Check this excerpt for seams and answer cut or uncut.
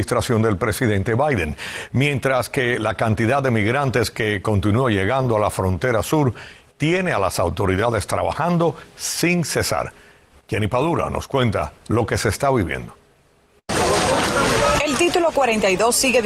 uncut